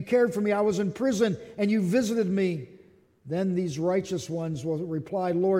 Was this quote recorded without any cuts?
yes; 0 cuts

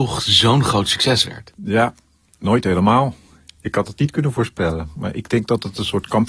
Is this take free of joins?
yes; 0 cuts

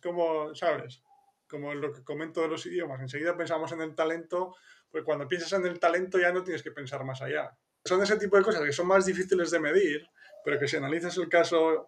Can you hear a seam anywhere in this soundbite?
yes; 1 cut; at 7.9 s

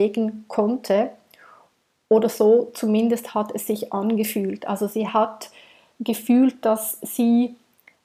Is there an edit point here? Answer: no; 0 cuts

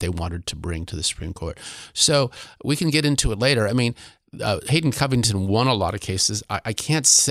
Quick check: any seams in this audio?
no; 0 cuts

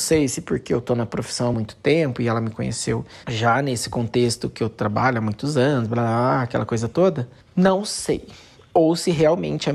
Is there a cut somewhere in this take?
no; 0 cuts

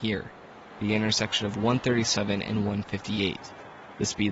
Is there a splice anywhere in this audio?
no; 0 cuts

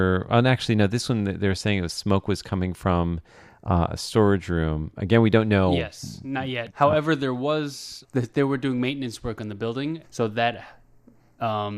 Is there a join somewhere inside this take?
yes; 3 cuts; at 6.7 s, 8.0 s, 10.0 s

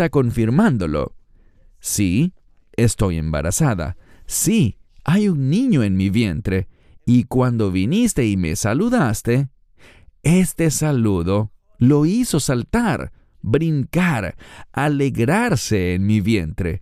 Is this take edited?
no; 0 cuts

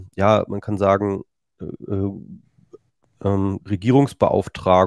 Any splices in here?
yes; 1 cut; at 3.6 s

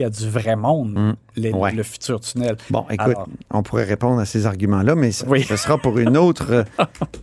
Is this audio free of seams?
yes; 0 cuts

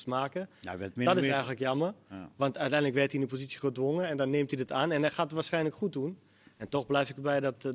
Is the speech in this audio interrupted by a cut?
no; 0 cuts

